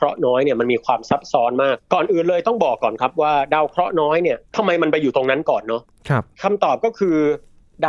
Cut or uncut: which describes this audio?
cut